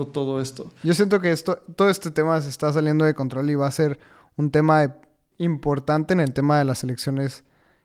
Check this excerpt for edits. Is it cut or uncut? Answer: cut